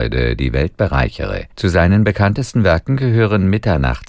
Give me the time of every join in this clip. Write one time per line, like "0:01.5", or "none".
0:01.5